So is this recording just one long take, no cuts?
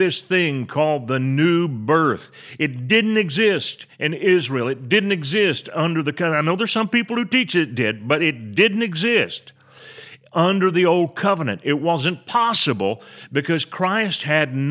yes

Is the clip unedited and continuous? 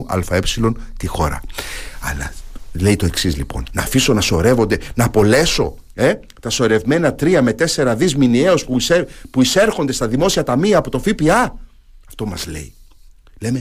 no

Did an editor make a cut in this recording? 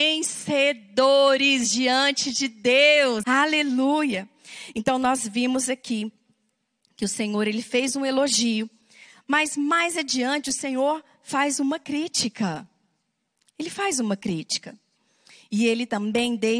yes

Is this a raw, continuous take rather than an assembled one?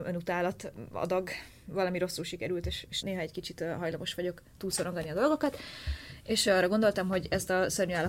no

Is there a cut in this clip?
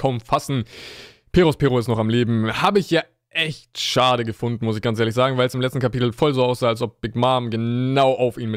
no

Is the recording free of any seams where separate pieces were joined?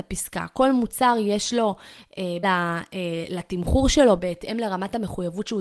no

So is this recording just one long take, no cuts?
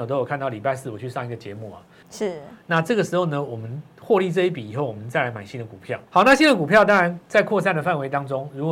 no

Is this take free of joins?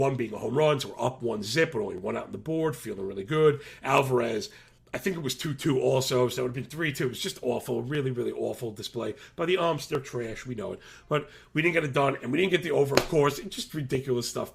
yes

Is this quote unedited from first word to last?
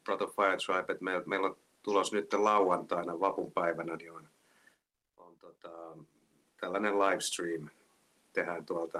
yes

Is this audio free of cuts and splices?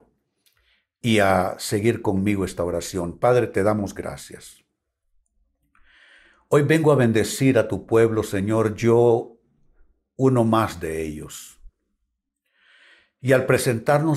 yes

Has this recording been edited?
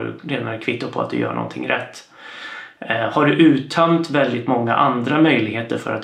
no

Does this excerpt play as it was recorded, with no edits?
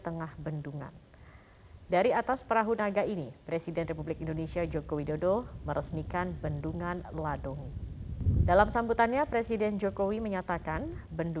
yes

